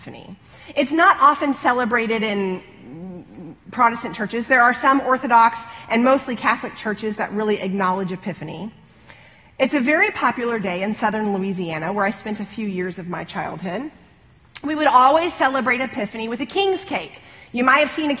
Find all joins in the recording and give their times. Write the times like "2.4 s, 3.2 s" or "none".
none